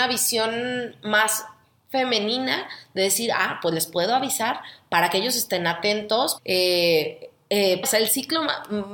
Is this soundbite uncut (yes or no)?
no